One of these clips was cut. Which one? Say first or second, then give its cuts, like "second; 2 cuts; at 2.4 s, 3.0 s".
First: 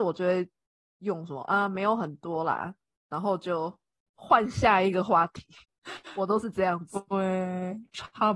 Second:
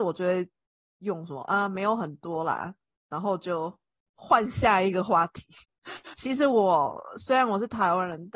second; 1 cut; at 6.1 s